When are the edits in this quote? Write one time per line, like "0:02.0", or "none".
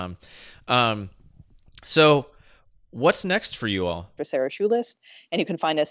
0:04.2

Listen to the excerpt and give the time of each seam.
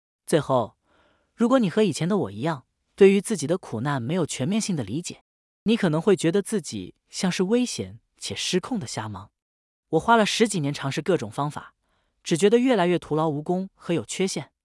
none

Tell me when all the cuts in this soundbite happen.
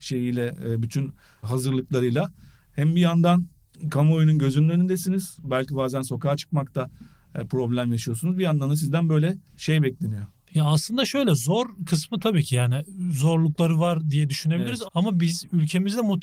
0:09.5
0:14.9

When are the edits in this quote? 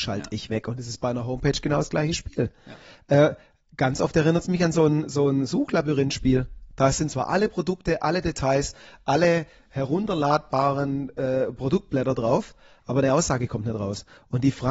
none

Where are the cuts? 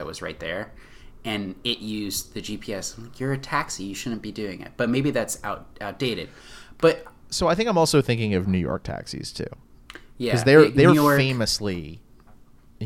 none

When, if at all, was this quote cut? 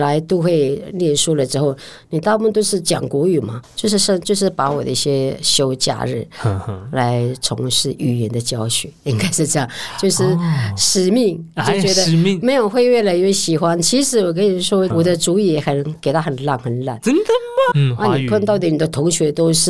0:03.6
0:14.9
0:17.7

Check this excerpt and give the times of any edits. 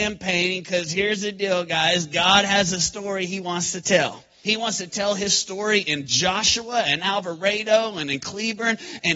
0:04.4

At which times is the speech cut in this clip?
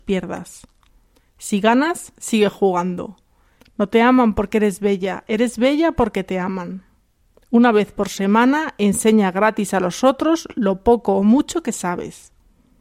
0:03.6
0:07.3

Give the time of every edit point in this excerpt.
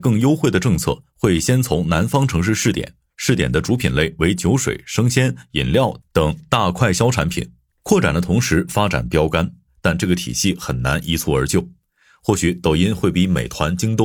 0:07.7
0:09.7

